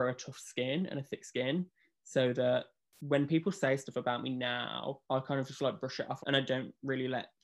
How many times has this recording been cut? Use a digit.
2